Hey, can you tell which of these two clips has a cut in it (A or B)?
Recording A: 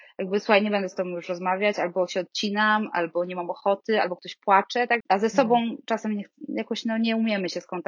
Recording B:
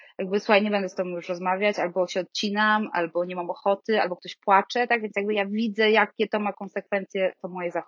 A